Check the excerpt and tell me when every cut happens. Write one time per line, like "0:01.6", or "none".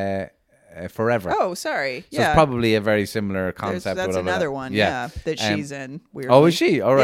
none